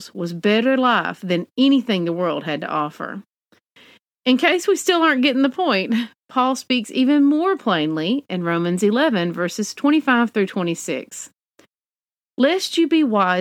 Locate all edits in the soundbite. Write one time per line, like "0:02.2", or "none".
none